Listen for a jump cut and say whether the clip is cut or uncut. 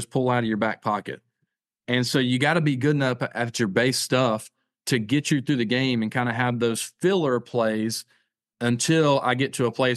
uncut